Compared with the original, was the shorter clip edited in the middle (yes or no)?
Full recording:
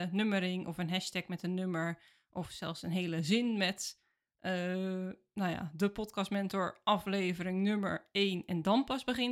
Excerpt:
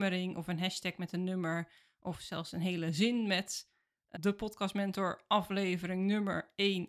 yes